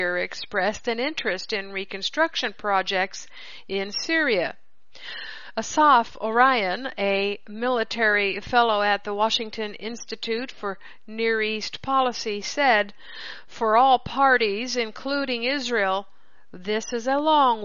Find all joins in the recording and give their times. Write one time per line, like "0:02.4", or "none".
none

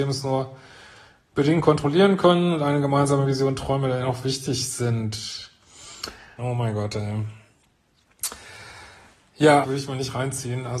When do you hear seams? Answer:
0:06.4
0:09.6

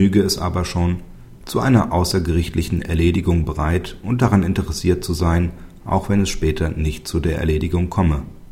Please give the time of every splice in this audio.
0:01.4

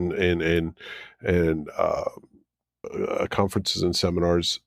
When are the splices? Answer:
0:02.8

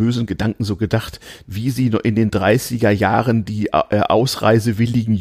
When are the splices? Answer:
0:01.4

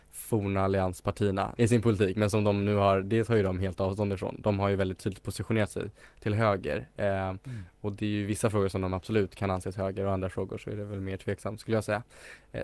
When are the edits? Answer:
0:01.6

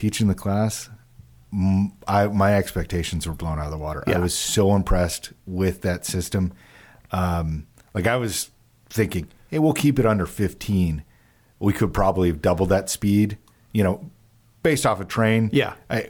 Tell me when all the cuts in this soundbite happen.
none

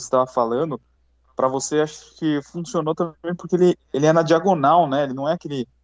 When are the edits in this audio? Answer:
none

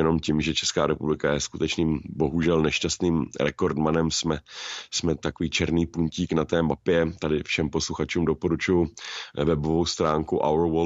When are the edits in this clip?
none

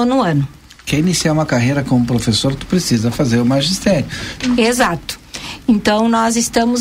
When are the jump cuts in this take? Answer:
0:04.4

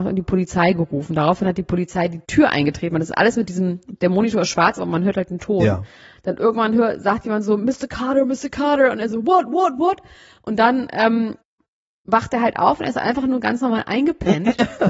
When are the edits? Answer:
none

